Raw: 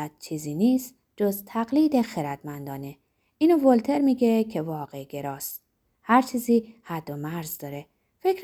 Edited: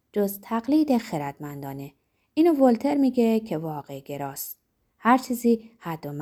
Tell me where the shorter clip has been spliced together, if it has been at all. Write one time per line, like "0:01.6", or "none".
none